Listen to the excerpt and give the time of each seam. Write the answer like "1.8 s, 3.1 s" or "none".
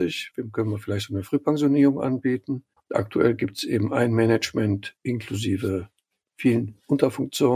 2.8 s